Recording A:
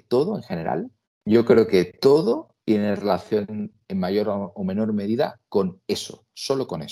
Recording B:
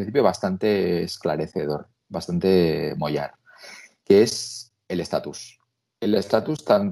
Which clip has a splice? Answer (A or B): A